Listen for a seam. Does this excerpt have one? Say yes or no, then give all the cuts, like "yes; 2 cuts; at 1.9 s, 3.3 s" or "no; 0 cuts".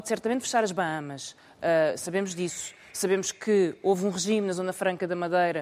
no; 0 cuts